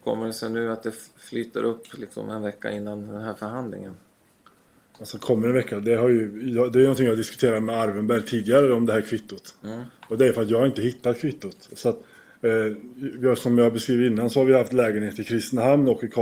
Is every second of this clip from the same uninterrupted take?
yes; 0 cuts

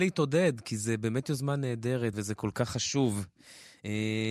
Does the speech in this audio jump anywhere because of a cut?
yes; 1 cut; at 2.1 s

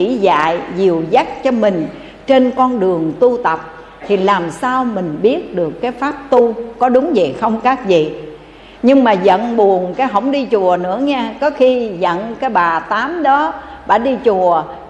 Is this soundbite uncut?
yes; 0 cuts

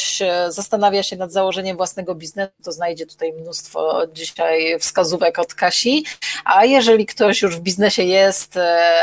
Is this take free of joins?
yes; 0 cuts

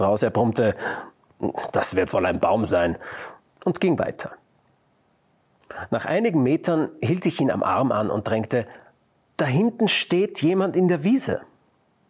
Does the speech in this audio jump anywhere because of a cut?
no; 0 cuts

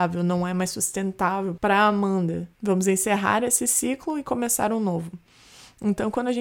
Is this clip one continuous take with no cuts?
no; 1 cut; at 2.5 s

